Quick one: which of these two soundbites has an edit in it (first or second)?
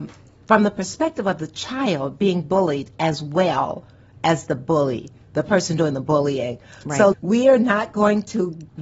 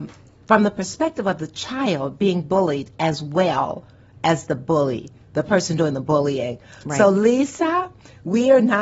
first